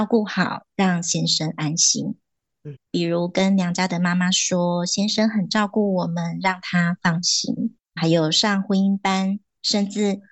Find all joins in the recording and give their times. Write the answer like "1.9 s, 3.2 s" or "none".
2.8 s, 7.8 s